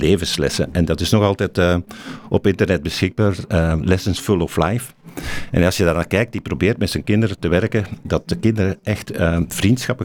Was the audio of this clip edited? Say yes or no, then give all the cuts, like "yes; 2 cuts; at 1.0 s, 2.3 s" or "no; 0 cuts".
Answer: no; 0 cuts